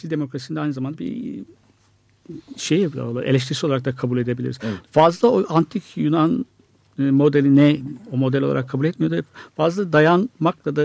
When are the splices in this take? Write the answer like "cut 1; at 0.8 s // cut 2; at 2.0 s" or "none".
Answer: none